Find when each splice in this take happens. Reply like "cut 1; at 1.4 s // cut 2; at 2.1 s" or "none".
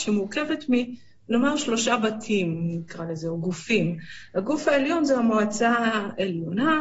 none